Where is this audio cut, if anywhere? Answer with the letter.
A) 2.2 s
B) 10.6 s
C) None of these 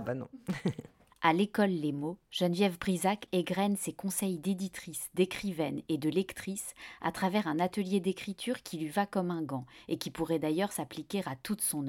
C